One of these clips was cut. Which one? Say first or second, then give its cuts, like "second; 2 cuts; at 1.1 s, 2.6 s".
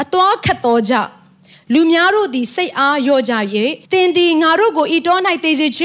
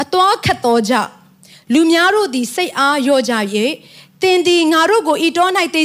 first; 1 cut; at 3.8 s